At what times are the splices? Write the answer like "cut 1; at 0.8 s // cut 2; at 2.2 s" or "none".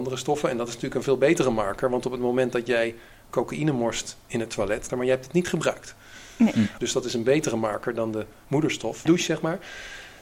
cut 1; at 4.9 s // cut 2; at 6.8 s // cut 3; at 9.1 s